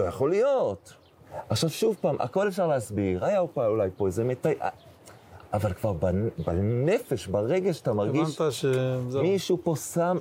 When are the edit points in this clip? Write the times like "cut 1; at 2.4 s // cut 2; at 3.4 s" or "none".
none